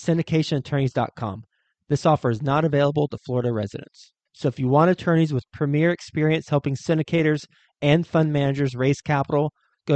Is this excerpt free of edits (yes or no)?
no